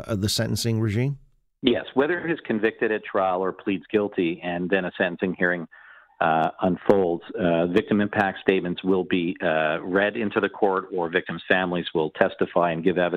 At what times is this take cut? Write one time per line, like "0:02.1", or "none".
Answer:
none